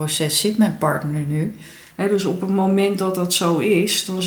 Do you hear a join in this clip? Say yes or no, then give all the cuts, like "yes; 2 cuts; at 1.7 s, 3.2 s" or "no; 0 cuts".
yes; 1 cut; at 1.9 s